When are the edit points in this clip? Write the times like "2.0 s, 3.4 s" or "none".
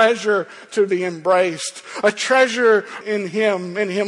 3.0 s